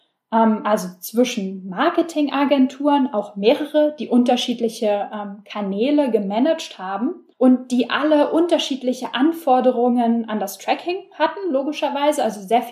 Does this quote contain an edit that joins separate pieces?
yes; 1 cut; at 7.3 s

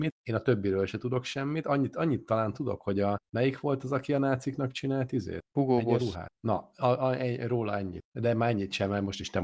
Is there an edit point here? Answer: no; 0 cuts

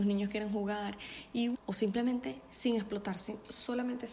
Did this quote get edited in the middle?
yes; 1 cut; at 1.5 s

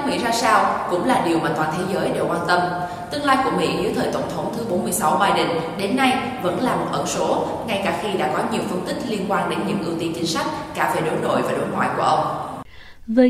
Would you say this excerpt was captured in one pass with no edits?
yes; 0 cuts

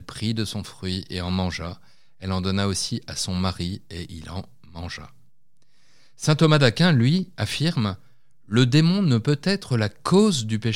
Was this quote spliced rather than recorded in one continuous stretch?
no; 0 cuts

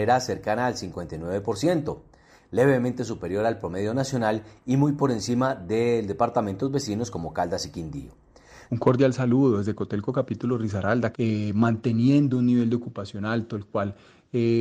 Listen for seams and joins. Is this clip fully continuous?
no; 2 cuts; at 8.7 s, 11.1 s

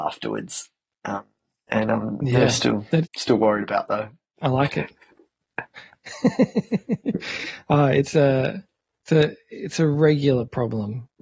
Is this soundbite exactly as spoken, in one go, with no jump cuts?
no; 1 cut; at 3.0 s

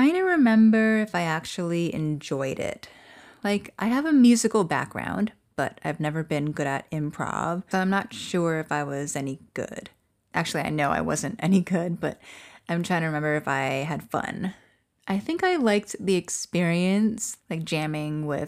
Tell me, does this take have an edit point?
yes; 1 cut; at 7.7 s

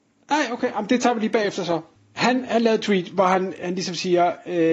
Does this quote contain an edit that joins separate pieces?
yes; 1 cut; at 2.0 s

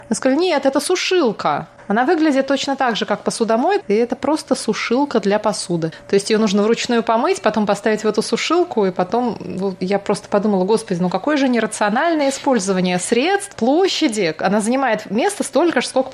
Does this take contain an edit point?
yes; 1 cut; at 3.8 s

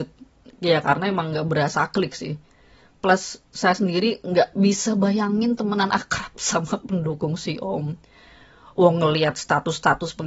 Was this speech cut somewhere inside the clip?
no; 0 cuts

